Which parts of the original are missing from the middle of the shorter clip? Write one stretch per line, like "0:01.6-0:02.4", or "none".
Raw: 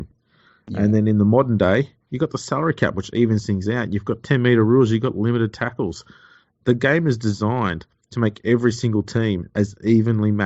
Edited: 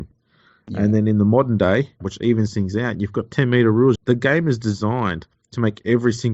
0:02.0-0:02.9
0:04.9-0:06.5